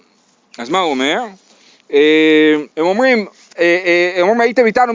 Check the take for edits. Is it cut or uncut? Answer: cut